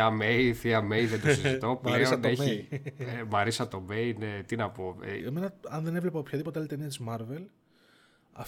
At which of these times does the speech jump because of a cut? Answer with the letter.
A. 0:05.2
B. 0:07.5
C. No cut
A